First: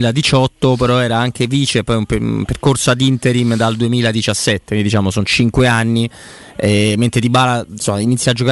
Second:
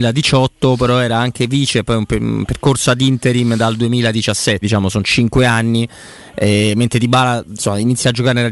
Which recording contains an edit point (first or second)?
second